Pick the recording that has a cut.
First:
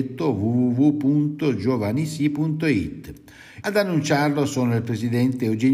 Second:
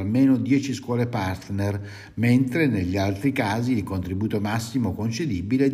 first; 1 cut; at 3.6 s

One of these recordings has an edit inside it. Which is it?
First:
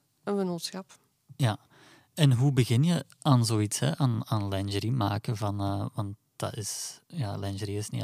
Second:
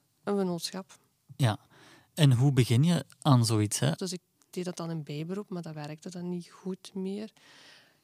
second; 1 cut; at 4.0 s

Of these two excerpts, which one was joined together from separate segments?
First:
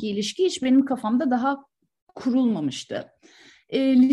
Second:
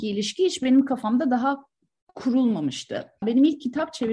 second; 1 cut; at 3.2 s

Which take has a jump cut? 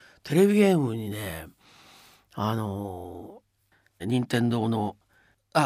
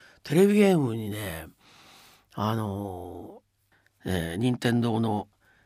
first; 1 cut; at 4.0 s

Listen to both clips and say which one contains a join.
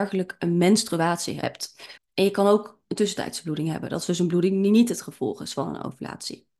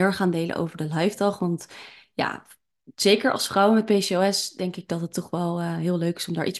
first; 1 cut; at 2.0 s

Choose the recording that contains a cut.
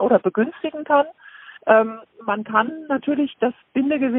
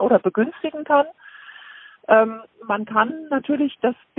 first; 1 cut; at 1.6 s

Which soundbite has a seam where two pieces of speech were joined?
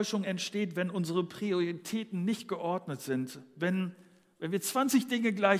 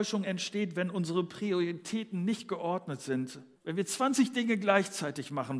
second; 1 cut; at 3.5 s

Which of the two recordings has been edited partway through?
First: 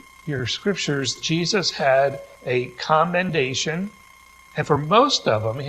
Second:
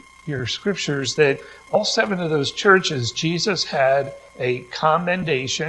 first; 1 cut; at 1.2 s

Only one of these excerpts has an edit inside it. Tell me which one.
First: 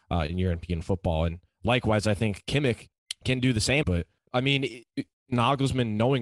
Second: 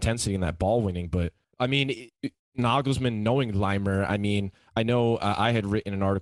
first; 1 cut; at 3.8 s

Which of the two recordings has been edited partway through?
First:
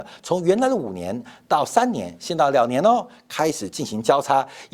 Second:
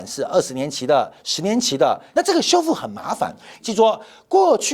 second; 2 cuts; at 2.1 s, 3.6 s

